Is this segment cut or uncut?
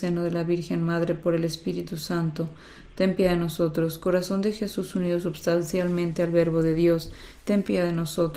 uncut